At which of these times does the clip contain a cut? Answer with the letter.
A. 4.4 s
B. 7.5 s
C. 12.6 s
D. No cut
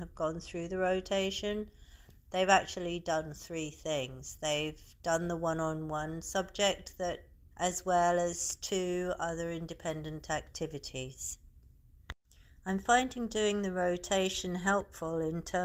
B